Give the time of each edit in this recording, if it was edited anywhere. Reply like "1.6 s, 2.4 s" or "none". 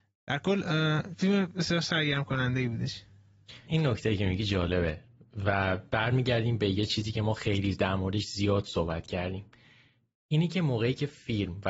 3.7 s